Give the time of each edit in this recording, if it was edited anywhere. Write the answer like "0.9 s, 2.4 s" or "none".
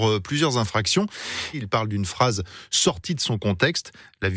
1.5 s